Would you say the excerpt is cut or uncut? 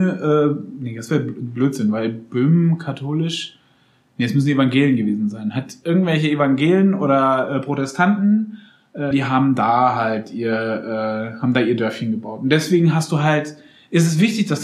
cut